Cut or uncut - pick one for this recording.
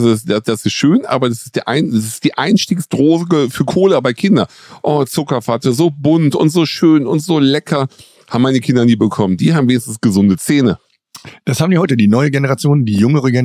uncut